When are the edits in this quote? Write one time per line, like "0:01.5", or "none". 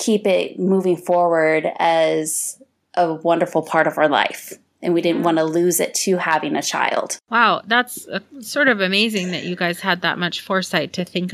0:07.2

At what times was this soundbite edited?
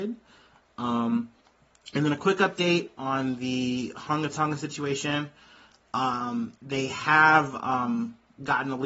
none

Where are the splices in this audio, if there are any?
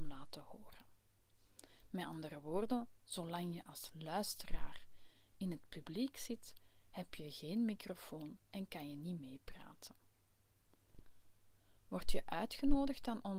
none

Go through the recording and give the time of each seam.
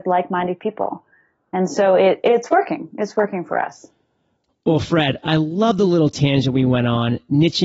none

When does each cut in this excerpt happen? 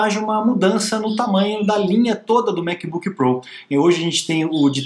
none

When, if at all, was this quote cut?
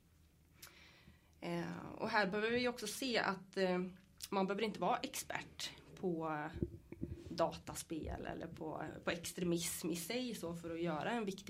none

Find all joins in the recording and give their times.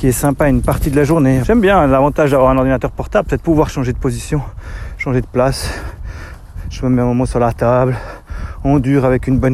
0:01.4

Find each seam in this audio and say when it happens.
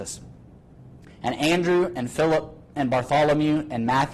0:01.1

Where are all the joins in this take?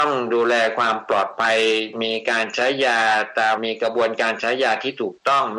0:03.6

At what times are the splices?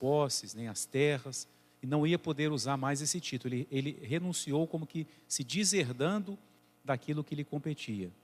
none

